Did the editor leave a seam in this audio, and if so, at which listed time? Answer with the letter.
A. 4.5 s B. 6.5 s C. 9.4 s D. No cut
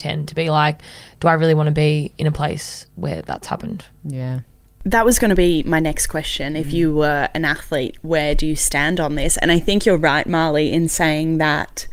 D